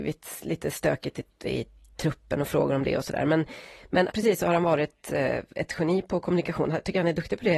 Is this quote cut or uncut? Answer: cut